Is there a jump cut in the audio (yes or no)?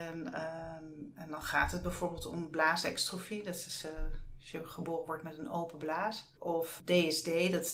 yes